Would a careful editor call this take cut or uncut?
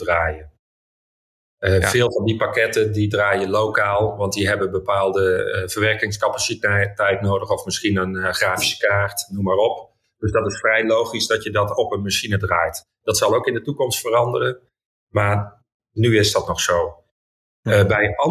uncut